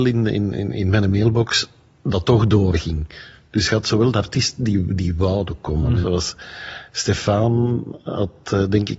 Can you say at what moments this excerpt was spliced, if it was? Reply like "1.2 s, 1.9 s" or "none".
6.0 s